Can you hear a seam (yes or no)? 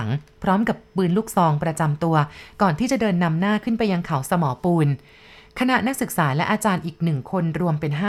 no